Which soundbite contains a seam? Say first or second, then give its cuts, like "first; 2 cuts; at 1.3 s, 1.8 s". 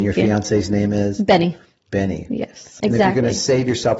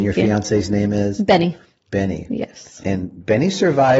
first; 1 cut; at 2.8 s